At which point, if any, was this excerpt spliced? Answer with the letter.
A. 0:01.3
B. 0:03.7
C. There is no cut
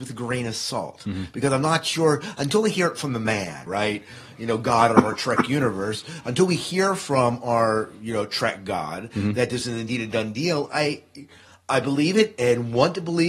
B